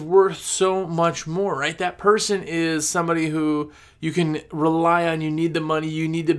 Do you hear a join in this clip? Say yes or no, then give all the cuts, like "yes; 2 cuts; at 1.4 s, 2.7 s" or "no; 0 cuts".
no; 0 cuts